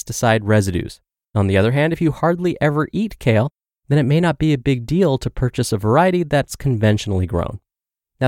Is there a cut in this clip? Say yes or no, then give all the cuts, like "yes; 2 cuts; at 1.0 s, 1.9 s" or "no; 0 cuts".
yes; 1 cut; at 1.2 s